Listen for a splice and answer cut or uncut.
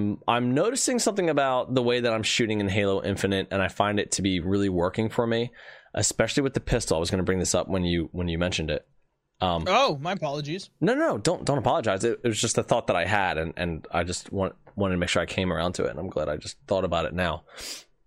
uncut